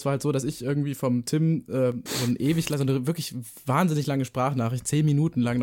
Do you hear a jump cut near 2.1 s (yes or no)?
yes